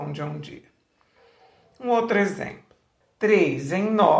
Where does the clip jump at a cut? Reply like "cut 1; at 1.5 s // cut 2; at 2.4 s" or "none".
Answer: cut 1; at 3.0 s